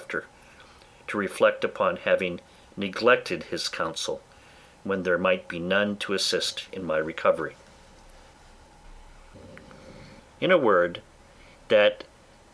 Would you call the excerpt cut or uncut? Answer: cut